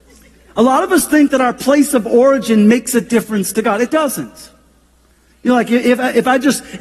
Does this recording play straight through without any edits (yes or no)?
yes